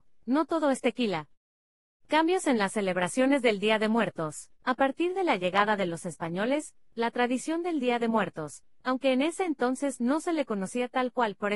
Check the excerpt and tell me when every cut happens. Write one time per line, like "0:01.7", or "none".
0:04.6